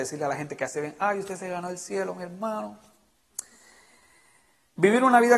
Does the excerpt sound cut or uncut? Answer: uncut